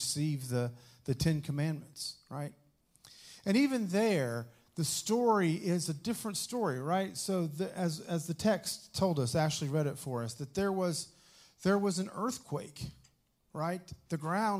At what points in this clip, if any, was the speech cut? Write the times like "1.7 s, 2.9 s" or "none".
none